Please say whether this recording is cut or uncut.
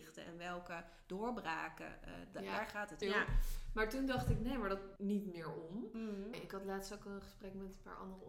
cut